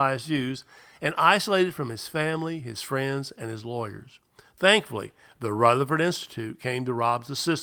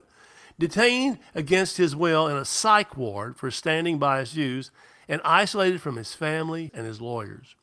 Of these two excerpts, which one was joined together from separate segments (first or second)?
second